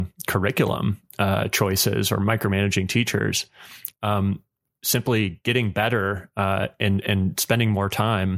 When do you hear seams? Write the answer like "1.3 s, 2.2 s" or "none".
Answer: none